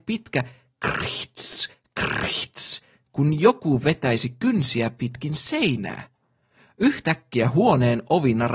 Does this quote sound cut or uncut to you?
uncut